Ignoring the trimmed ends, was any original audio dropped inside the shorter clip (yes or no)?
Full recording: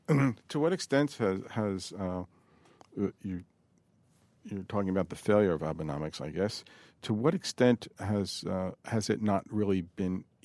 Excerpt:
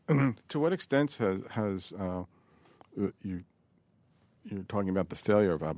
no